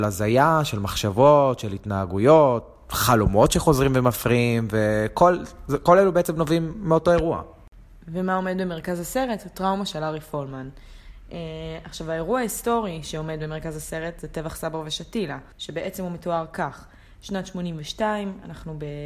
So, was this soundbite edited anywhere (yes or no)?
yes